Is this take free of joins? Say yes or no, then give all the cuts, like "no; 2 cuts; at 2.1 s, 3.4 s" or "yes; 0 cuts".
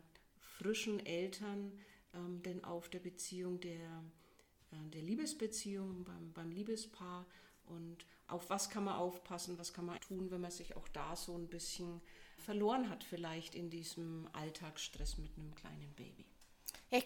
no; 2 cuts; at 10.0 s, 12.4 s